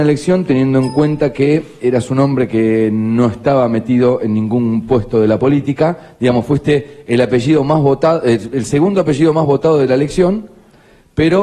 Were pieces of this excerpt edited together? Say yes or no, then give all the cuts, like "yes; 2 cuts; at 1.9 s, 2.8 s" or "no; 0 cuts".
no; 0 cuts